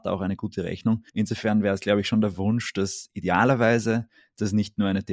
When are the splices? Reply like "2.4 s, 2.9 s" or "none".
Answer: 1.1 s